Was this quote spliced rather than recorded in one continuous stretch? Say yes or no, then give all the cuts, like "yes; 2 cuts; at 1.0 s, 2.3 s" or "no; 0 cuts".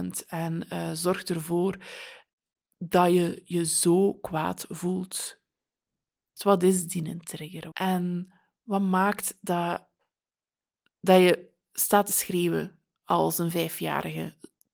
yes; 2 cuts; at 6.4 s, 7.7 s